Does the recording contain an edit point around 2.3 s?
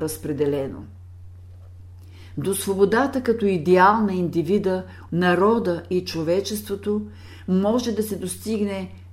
no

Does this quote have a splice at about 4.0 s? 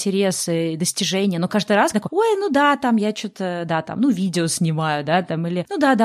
no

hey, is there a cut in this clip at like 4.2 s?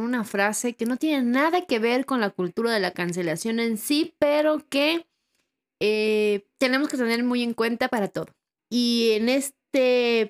no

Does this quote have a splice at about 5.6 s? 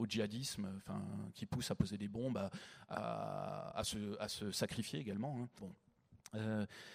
yes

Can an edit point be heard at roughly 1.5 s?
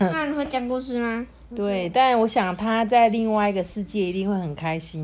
yes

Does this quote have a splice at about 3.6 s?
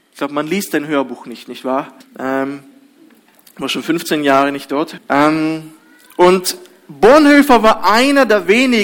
no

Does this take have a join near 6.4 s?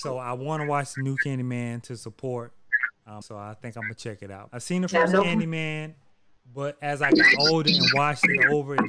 no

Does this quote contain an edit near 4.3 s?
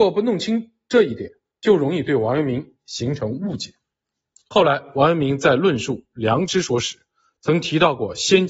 no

